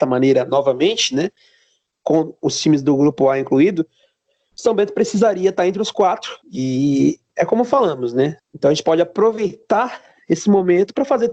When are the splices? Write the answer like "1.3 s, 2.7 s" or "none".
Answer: 6.4 s, 8.4 s